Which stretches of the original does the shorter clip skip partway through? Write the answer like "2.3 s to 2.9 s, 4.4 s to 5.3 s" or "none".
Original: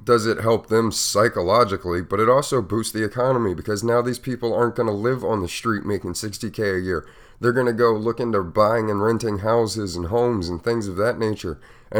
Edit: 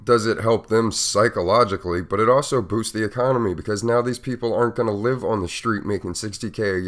none

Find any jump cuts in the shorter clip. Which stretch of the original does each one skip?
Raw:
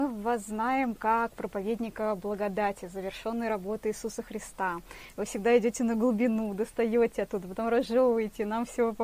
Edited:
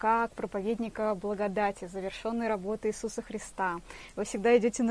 none

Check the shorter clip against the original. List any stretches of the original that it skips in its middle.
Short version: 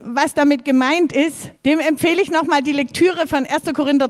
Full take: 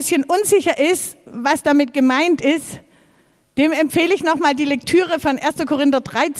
2.8 s to 3.5 s

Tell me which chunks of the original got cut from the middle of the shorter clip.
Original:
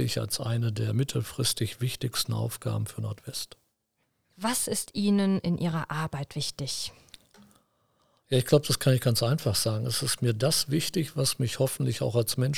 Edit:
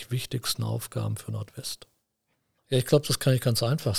4.3 s to 8.2 s

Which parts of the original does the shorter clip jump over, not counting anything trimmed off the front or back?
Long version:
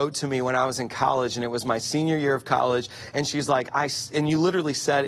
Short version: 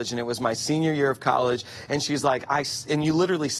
none

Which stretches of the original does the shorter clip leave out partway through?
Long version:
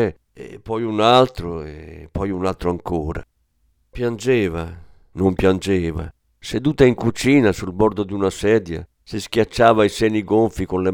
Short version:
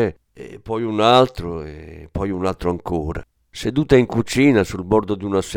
3.5 s to 6.4 s

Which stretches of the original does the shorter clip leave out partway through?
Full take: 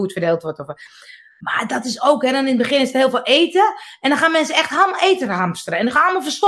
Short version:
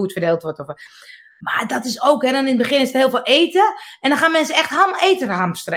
none

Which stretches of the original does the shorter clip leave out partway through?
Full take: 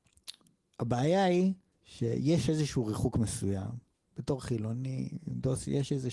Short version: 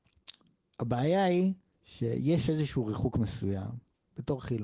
none

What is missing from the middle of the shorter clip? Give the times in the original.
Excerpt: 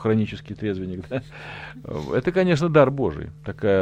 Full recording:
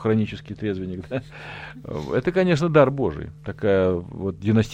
none

